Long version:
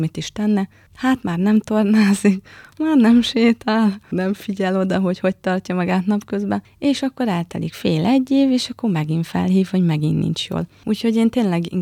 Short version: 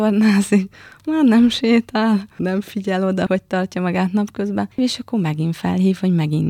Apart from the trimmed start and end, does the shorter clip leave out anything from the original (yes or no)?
yes